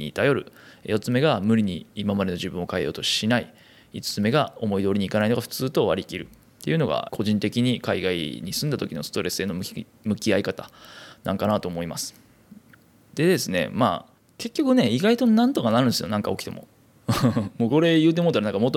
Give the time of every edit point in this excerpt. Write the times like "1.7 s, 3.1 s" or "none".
7.1 s